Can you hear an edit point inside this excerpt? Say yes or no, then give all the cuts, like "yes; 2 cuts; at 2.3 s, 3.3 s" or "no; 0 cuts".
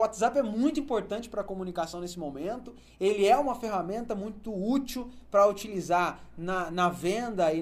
no; 0 cuts